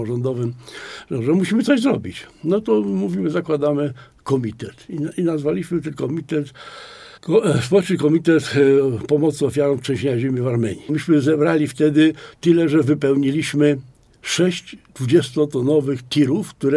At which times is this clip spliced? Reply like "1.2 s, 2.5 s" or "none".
7.2 s, 10.9 s